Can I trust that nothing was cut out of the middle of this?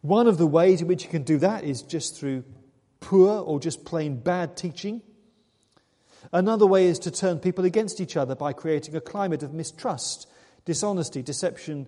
yes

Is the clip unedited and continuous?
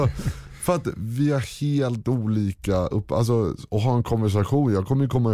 yes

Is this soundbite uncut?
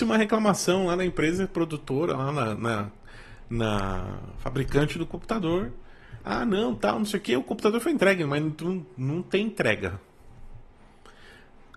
yes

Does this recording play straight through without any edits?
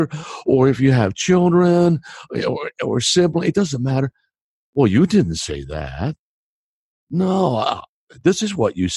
yes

